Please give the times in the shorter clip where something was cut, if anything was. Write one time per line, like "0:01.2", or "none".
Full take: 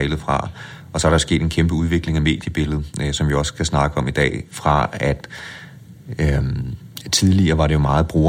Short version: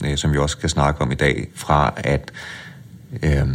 none

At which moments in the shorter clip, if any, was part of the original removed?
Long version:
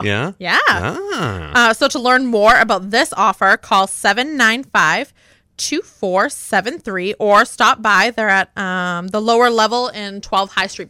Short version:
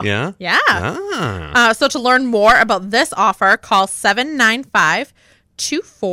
none

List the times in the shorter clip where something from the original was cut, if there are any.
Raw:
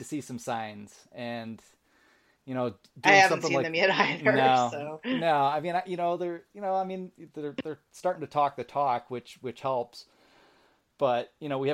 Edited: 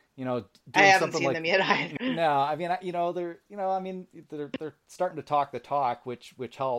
0:02.0

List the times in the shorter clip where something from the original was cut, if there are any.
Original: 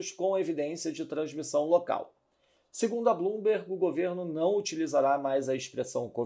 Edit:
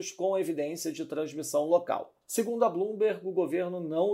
0:02.2

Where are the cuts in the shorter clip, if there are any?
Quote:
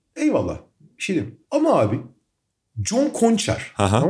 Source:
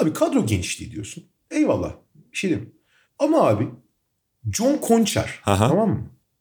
0:01.4

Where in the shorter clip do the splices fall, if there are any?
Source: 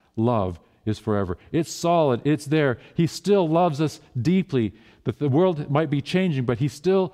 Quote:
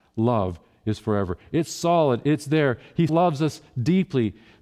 0:03.1

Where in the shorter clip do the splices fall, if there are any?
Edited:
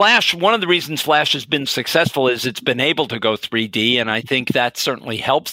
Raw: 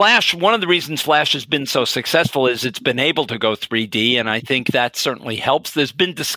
0:01.7

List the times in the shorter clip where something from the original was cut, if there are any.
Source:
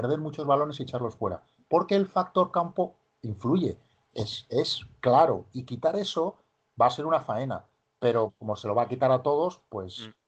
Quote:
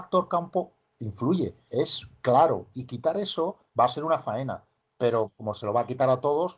0:01.7
0:03.7

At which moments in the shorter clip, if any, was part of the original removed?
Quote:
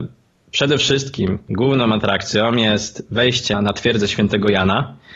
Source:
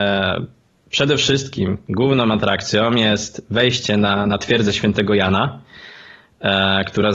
0:03.5

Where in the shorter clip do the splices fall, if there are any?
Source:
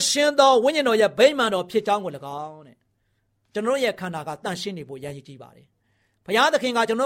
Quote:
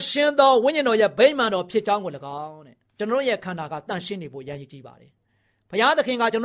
0:02.9

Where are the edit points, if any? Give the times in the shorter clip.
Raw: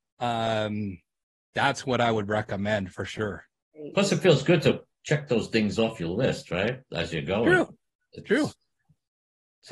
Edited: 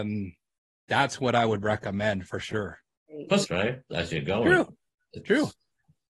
0:03.4

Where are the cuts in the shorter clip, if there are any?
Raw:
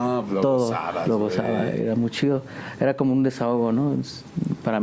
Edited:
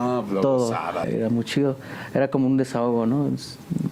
0:01.0

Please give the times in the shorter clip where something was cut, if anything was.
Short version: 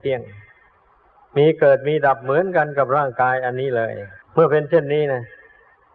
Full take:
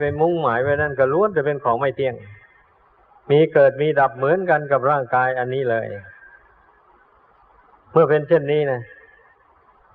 0:04.2

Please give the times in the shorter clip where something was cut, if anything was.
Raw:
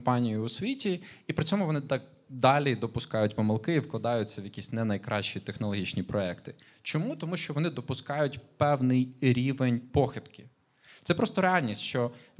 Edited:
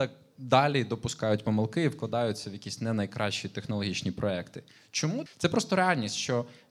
0:05.3

